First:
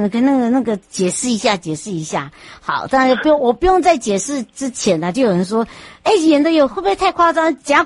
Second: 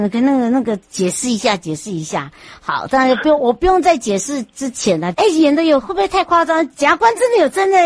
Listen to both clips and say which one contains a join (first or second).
second